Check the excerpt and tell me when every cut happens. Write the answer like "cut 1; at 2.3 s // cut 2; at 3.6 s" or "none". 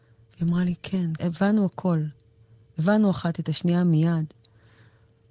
cut 1; at 1.2 s